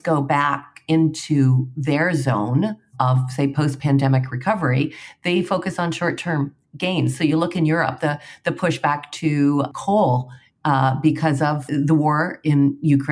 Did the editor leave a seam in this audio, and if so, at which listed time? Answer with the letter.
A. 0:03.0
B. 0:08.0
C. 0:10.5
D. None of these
D